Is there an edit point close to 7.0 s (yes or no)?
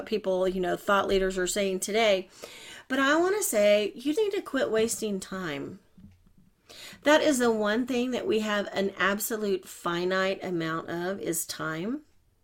no